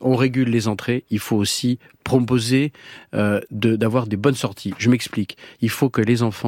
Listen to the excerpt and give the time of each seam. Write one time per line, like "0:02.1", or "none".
none